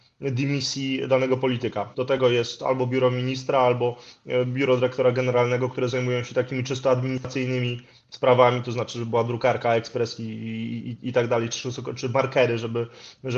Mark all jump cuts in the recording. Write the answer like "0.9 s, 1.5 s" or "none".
1.9 s

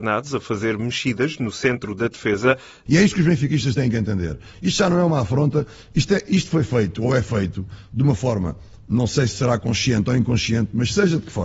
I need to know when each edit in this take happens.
2.9 s

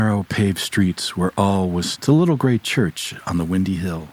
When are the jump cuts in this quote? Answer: 1.9 s

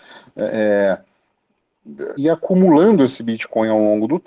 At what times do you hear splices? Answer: 2.2 s

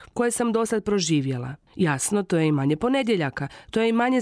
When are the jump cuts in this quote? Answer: none

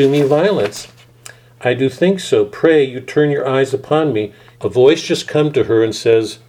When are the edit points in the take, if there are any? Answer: 4.6 s

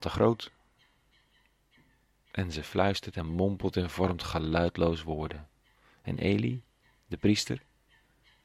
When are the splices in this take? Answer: none

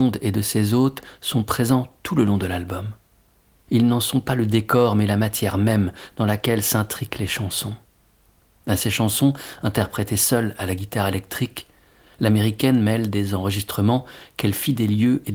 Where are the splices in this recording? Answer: 8.6 s

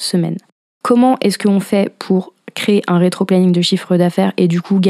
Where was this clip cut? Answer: none

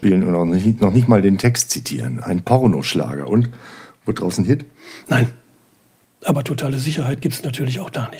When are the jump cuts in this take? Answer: 6.0 s

